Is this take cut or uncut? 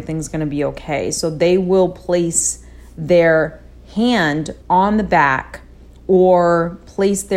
cut